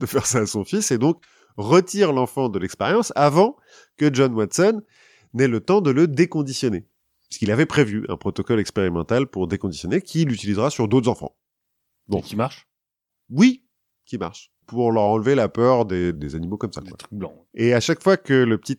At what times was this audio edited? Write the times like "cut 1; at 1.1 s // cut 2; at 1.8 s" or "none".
cut 1; at 16.1 s // cut 2; at 17.5 s